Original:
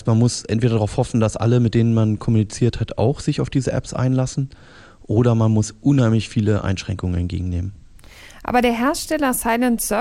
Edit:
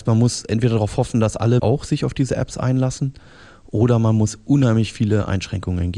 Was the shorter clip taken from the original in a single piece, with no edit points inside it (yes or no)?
no